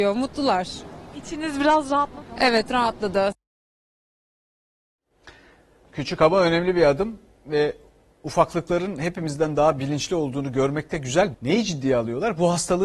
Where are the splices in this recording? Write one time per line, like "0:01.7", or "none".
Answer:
0:11.3